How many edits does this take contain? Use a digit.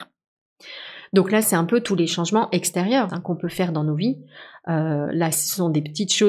1